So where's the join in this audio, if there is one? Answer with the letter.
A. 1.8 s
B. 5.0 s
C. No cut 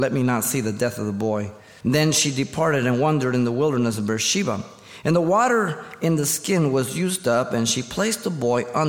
A